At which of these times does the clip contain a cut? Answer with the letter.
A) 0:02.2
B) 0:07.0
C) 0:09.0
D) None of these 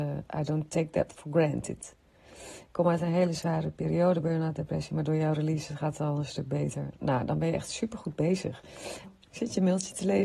C